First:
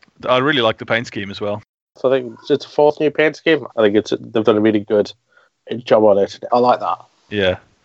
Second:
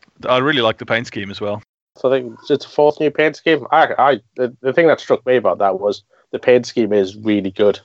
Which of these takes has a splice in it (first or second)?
first